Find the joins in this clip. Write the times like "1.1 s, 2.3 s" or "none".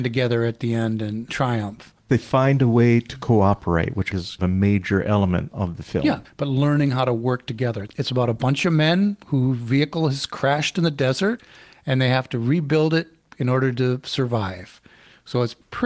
6.2 s, 7.9 s